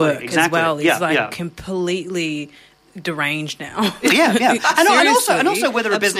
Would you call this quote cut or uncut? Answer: uncut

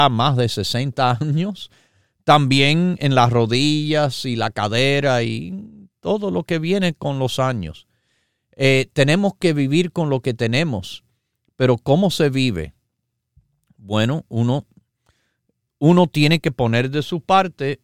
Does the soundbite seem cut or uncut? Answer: uncut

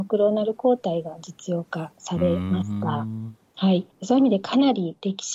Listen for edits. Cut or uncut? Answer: uncut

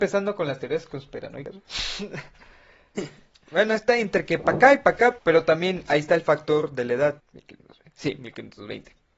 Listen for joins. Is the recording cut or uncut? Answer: cut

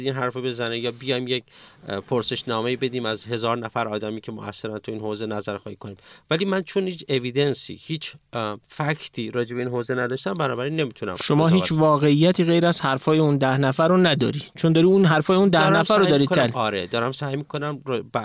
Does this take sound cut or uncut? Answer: cut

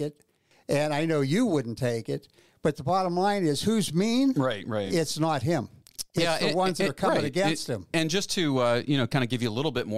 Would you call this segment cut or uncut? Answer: uncut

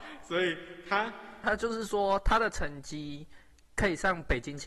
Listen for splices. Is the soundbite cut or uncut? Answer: cut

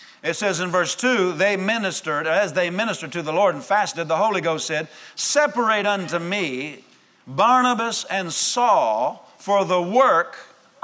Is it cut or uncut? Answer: uncut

